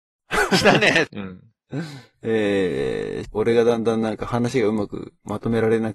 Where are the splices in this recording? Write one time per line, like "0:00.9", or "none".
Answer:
0:01.1
0:03.2